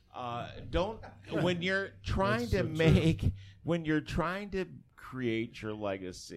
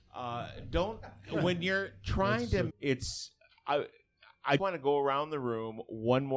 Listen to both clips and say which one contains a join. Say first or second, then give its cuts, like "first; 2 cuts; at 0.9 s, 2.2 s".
second; 2 cuts; at 2.7 s, 4.6 s